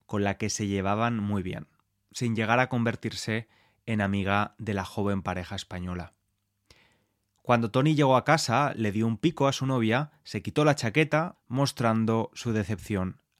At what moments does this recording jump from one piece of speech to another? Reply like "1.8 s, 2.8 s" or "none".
11.3 s